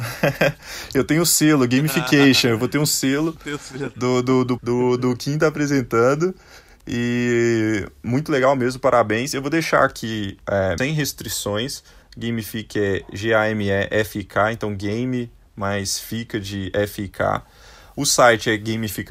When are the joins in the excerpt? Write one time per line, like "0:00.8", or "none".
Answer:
0:04.6
0:10.8
0:12.0